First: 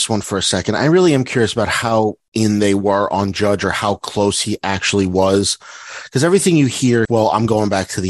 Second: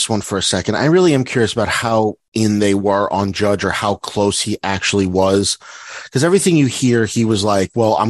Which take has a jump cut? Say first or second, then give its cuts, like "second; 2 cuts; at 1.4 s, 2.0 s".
first; 1 cut; at 7.1 s